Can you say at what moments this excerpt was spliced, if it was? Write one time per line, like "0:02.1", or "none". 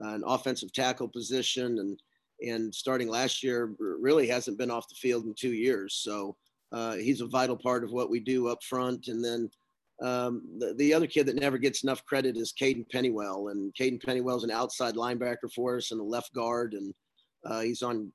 none